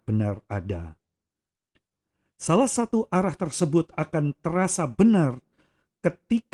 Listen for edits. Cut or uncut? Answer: uncut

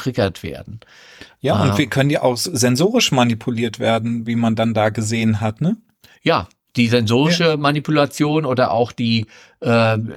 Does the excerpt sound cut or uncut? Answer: uncut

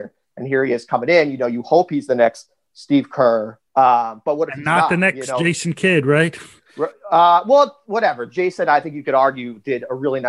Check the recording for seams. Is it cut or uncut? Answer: cut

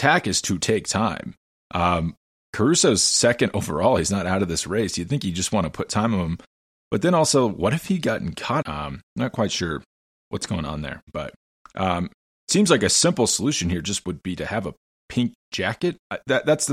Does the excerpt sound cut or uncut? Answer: cut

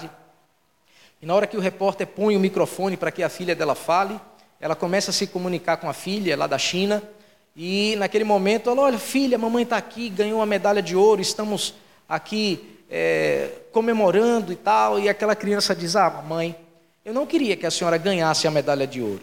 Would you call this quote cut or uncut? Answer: uncut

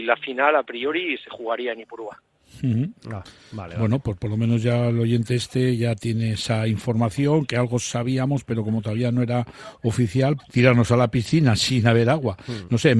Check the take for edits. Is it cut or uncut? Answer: cut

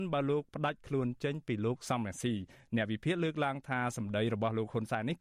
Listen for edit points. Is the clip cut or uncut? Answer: uncut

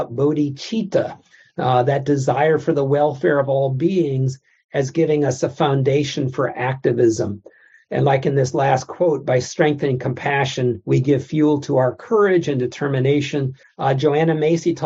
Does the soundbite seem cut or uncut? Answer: cut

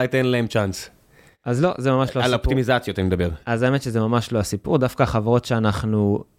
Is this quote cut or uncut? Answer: uncut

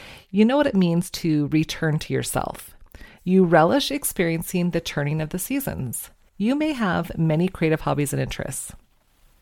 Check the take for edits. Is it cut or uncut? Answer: cut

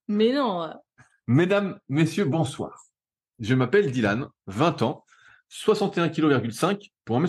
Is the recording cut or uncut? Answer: uncut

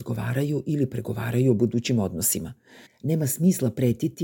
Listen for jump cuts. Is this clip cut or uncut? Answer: cut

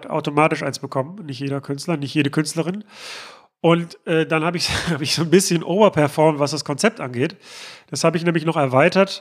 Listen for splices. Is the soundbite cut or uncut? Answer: uncut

